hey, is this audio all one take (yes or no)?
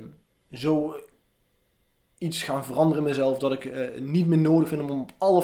yes